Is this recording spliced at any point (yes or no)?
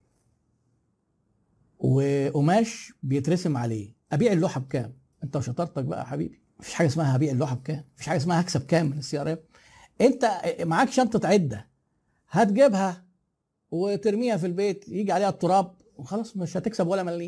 yes